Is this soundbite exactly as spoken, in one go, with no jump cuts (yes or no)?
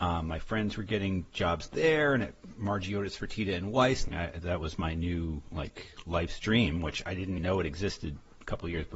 no